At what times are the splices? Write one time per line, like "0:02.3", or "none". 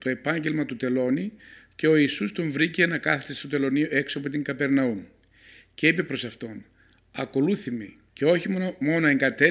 0:08.1